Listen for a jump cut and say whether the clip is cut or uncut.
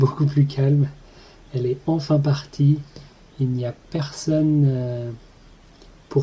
uncut